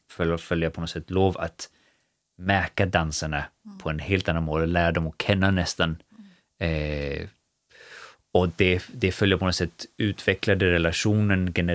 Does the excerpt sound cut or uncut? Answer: uncut